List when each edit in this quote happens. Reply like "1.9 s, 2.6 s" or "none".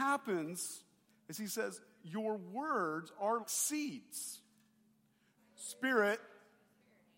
1.1 s, 3.4 s, 5.4 s